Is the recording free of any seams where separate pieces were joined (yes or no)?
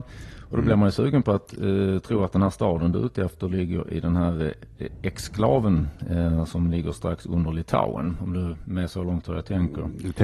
yes